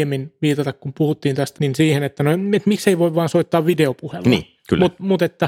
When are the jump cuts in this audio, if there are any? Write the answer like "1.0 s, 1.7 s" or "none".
1.5 s